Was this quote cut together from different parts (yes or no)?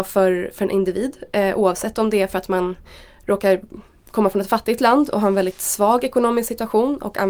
no